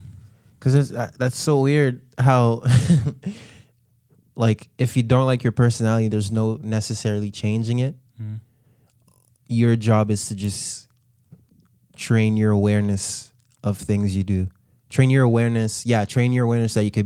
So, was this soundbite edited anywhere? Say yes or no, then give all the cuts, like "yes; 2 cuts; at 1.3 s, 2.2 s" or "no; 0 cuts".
no; 0 cuts